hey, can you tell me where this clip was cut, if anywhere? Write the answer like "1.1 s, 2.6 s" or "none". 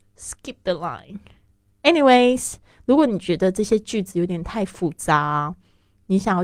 none